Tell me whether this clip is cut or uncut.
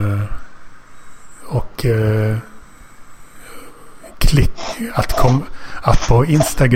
uncut